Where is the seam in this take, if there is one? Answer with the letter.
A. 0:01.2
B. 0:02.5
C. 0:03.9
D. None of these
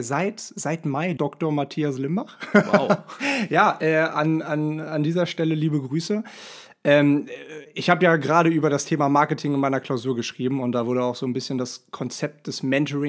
A